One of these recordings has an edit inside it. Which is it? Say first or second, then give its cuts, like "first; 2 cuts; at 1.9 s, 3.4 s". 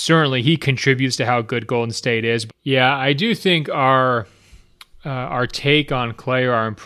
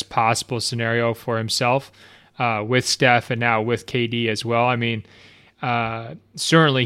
first; 1 cut; at 2.5 s